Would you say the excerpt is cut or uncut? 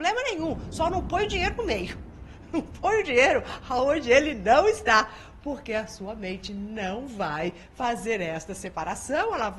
uncut